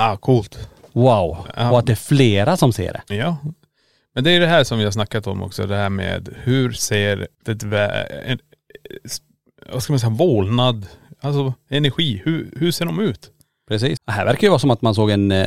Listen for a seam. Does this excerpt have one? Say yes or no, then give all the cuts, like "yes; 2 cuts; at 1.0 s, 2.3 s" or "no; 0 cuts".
yes; 2 cuts; at 7.4 s, 14.0 s